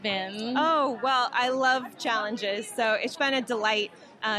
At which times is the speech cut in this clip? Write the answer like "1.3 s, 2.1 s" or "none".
3.1 s